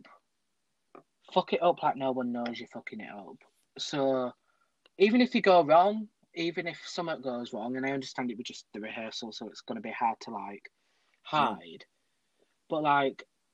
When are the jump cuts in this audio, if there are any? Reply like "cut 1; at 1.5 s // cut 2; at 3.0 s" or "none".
none